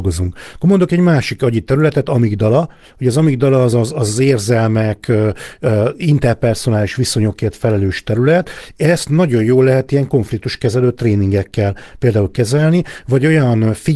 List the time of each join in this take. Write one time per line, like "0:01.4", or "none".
none